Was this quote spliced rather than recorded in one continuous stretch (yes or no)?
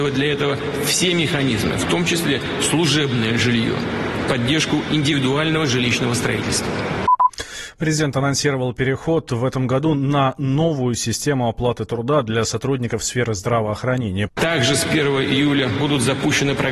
yes